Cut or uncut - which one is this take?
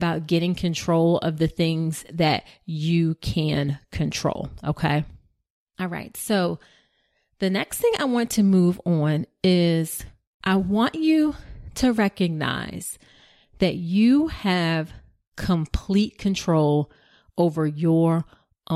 uncut